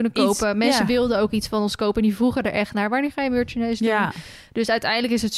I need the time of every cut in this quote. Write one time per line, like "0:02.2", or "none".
none